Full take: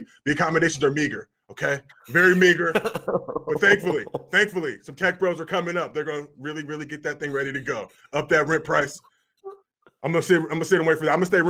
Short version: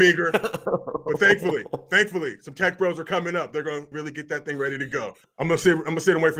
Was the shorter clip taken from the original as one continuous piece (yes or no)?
no